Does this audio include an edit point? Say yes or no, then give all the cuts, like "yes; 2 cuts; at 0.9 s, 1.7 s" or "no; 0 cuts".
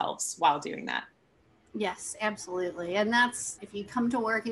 yes; 1 cut; at 3.6 s